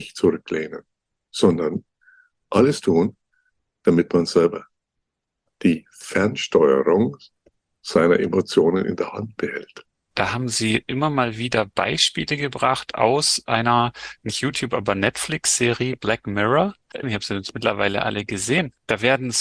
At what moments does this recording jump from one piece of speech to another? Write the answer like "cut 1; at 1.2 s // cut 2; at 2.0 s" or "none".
cut 1; at 10.1 s // cut 2; at 17.0 s